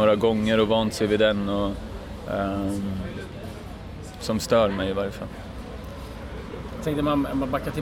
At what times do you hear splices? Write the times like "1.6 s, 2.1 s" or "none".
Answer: 4.2 s

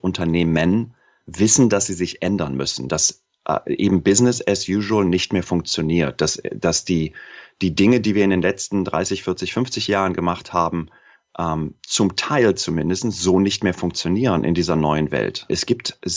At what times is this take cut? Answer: none

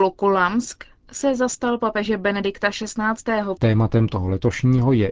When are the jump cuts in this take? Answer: 3.6 s

